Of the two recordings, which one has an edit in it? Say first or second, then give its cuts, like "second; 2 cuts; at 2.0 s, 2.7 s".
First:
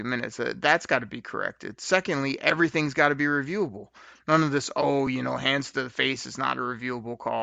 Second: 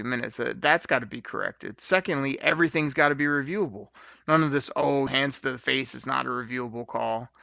second; 1 cut; at 5.1 s